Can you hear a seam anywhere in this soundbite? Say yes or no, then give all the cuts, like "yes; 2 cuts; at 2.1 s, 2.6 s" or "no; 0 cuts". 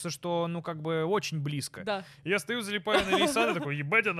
no; 0 cuts